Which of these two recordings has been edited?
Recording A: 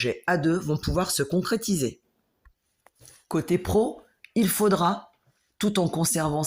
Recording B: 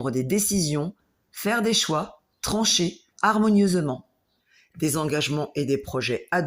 B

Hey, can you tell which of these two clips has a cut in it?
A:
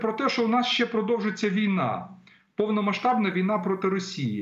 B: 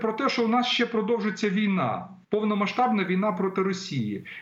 B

